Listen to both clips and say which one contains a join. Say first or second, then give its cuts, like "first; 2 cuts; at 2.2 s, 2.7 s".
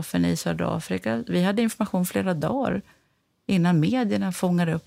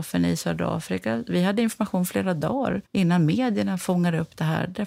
second; 1 cut; at 2.8 s